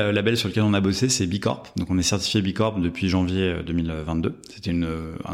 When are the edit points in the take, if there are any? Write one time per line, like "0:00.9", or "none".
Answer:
none